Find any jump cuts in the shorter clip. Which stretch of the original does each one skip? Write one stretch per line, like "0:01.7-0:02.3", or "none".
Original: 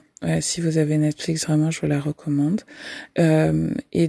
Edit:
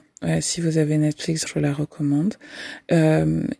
0:01.5-0:01.7